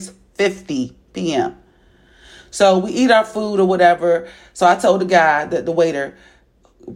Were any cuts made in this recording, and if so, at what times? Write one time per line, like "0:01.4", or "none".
none